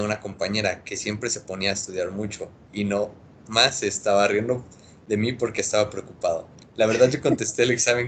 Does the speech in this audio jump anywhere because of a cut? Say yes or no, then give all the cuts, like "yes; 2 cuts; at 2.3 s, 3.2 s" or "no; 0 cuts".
yes; 1 cut; at 6.7 s